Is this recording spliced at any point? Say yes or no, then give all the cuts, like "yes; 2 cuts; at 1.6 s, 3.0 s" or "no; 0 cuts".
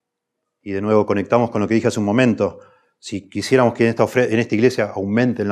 no; 0 cuts